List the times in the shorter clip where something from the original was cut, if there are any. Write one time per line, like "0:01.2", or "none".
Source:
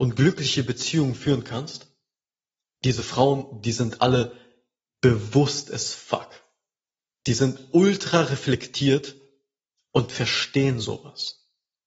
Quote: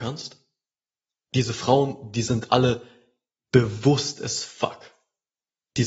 none